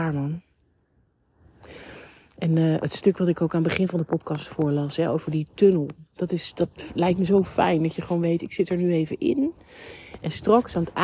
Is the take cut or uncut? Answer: uncut